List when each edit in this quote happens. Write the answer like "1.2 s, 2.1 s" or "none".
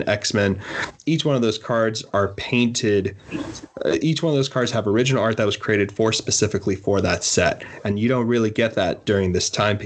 none